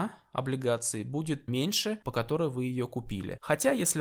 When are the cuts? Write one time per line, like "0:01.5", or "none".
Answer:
0:02.0